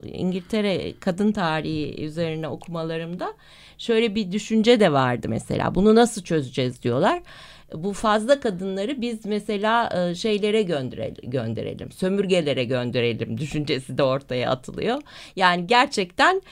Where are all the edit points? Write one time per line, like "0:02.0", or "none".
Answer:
none